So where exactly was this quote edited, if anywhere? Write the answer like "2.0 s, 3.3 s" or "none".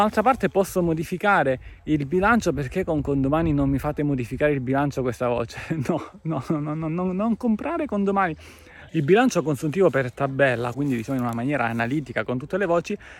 8.9 s, 10.7 s